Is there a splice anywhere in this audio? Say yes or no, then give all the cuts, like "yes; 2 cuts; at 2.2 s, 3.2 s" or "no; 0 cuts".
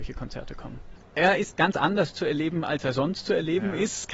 yes; 1 cut; at 1.0 s